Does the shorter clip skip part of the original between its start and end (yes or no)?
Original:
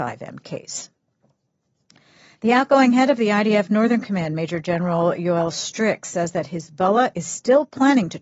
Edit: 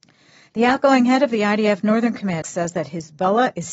yes